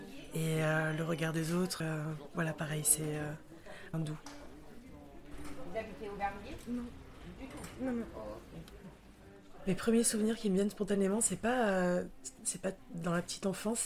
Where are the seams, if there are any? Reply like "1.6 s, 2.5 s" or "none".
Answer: 1.8 s, 3.9 s